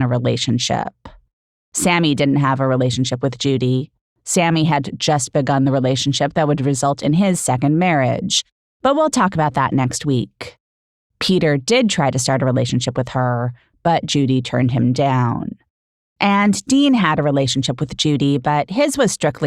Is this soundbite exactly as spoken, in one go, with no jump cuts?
yes; 0 cuts

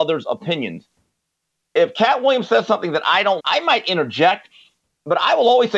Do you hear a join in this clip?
yes; 1 cut; at 3.4 s

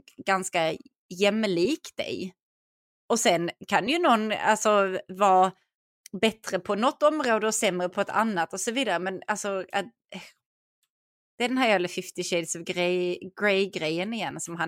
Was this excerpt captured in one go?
no; 1 cut; at 3.6 s

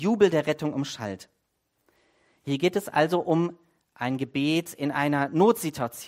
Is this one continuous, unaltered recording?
yes; 0 cuts

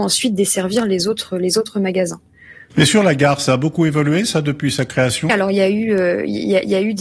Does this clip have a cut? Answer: yes; 2 cuts; at 2.7 s, 5.3 s

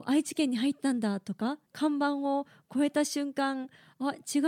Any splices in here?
yes; 1 cut; at 1.7 s

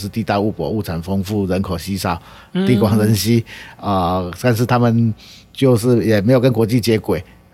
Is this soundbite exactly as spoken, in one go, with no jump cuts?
yes; 0 cuts

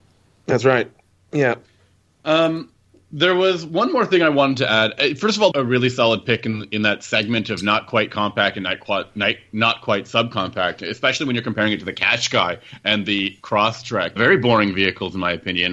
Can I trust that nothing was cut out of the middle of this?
no; 2 cuts; at 5.5 s, 14.2 s

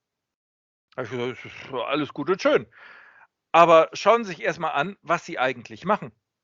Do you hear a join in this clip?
no; 0 cuts

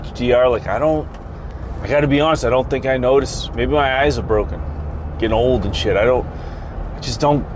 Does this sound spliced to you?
no; 0 cuts

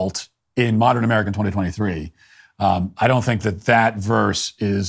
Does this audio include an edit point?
no; 0 cuts

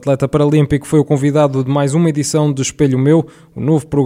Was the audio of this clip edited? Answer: no; 0 cuts

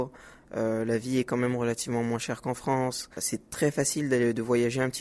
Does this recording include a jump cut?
no; 0 cuts

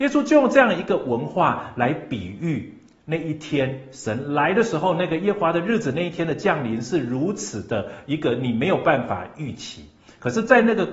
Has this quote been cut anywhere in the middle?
no; 0 cuts

